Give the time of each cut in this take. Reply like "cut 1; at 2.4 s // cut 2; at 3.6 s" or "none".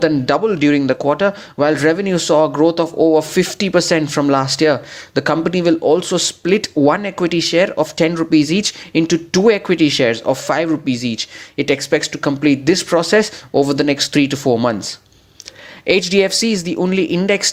none